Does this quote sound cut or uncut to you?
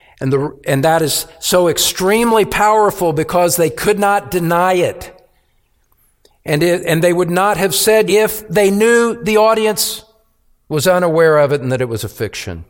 cut